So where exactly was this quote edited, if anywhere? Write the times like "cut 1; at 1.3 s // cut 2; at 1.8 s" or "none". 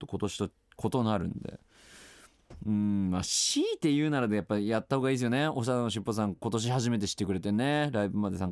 none